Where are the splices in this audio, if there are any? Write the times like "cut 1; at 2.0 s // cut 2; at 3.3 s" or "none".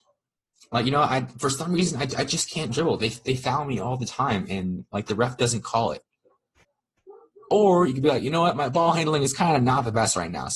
none